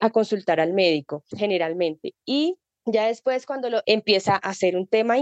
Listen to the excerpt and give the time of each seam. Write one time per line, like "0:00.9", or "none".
0:01.3
0:03.8